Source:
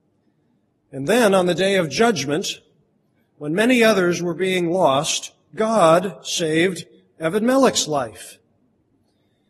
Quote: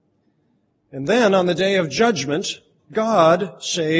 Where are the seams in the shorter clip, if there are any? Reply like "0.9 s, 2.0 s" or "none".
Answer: 2.8 s